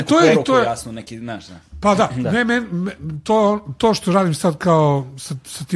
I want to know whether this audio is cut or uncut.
uncut